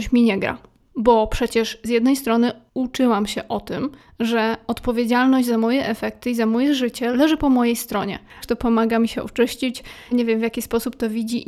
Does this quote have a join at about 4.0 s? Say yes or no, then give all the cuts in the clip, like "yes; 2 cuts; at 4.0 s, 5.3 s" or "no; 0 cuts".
no; 3 cuts; at 7.1 s, 8.4 s, 10.1 s